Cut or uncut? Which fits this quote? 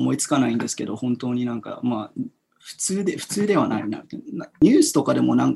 uncut